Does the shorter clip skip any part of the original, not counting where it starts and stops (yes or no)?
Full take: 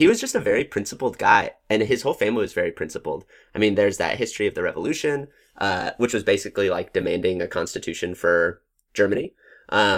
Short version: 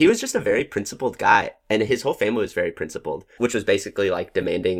yes